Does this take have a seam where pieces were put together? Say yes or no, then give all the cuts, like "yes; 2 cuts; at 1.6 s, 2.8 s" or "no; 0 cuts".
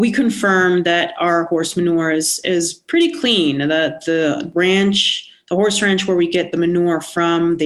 no; 0 cuts